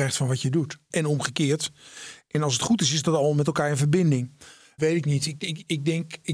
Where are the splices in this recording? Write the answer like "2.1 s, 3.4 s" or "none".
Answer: 0.9 s, 4.8 s